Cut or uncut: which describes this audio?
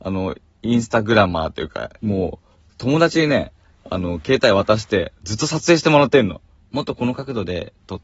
cut